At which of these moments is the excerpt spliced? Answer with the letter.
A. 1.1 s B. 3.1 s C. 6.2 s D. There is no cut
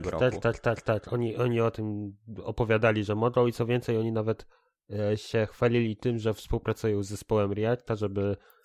D